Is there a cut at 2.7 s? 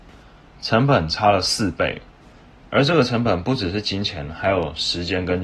no; 0 cuts

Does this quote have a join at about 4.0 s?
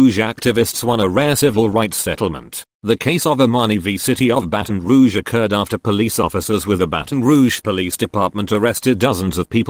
no; 0 cuts

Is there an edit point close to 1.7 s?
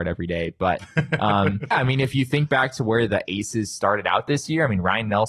yes; 2 cuts; at 1.7 s, 3.1 s

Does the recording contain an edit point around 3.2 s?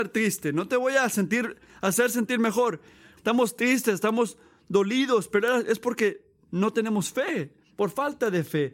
yes; 1 cut; at 3.2 s

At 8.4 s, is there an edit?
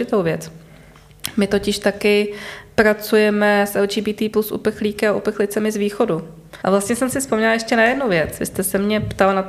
no; 1 cut; at 6.6 s

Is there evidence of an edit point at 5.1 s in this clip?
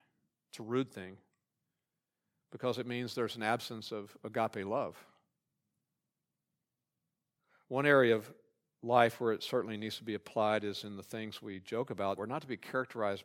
no; 1 cut; at 12.2 s

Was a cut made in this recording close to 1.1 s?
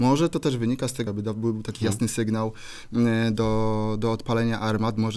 yes; 1 cut; at 1.1 s

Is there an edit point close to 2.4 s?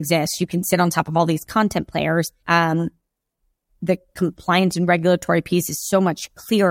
yes; 1 cut; at 2.4 s

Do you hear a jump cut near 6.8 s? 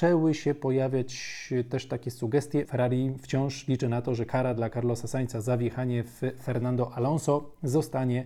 no; 1 cut; at 2.6 s

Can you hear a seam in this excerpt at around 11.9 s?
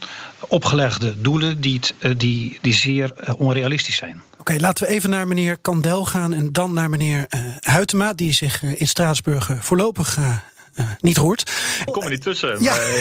yes; 1 cut; at 11.9 s

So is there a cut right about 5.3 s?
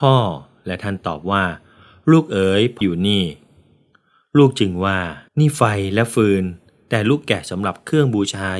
yes; 2 cuts; at 2.8 s, 5.3 s

